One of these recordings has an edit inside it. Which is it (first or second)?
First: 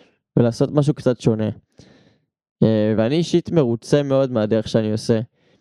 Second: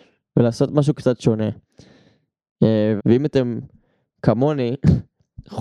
second